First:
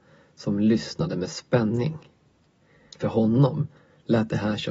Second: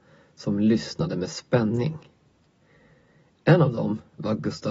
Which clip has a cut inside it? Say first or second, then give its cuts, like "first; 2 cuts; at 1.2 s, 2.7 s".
first; 1 cut; at 2.9 s